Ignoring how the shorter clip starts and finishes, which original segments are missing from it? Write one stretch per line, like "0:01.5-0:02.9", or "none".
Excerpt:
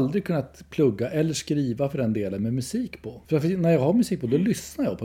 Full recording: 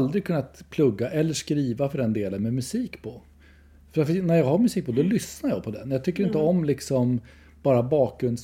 0:03.2-0:03.9